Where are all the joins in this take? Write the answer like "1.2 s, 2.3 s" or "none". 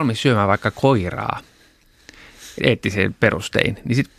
2.6 s